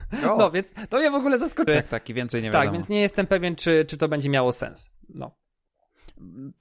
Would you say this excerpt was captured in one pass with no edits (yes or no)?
no